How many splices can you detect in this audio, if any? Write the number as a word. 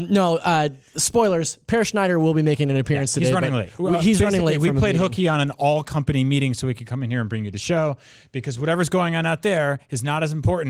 zero